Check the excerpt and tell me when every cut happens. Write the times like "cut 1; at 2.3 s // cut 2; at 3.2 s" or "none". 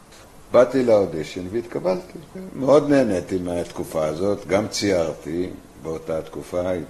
none